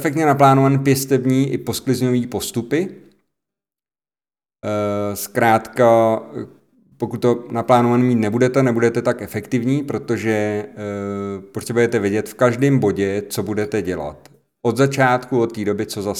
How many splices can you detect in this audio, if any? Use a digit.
0